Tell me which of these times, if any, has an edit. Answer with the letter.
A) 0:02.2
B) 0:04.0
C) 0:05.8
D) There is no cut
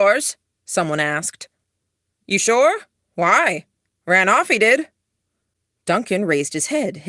A